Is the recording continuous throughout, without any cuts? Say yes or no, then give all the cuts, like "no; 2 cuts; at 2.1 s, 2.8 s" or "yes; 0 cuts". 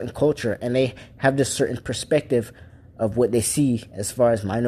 yes; 0 cuts